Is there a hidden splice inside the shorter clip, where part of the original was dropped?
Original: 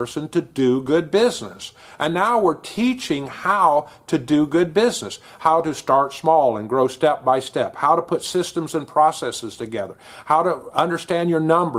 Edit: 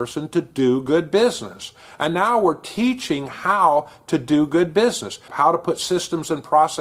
yes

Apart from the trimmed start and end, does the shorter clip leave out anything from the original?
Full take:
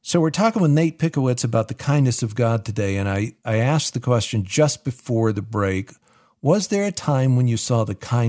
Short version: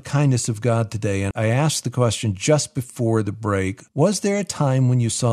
yes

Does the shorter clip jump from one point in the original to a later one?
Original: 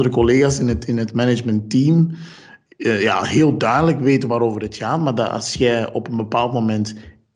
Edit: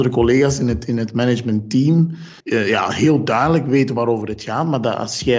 yes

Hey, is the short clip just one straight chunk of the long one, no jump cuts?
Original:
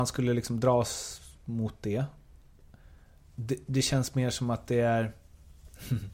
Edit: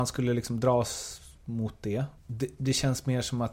no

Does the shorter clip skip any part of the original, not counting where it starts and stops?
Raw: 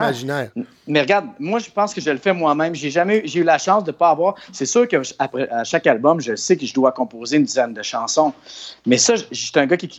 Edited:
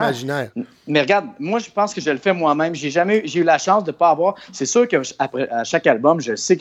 no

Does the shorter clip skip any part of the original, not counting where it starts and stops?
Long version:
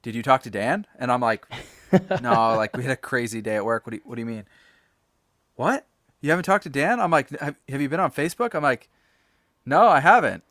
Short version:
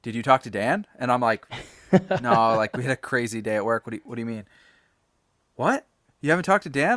no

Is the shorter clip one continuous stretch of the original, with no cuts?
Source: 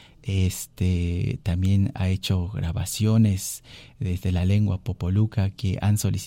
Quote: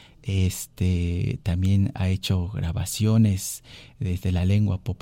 yes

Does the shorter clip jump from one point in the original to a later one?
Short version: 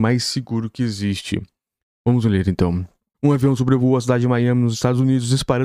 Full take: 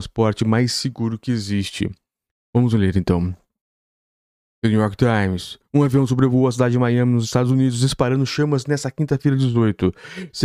yes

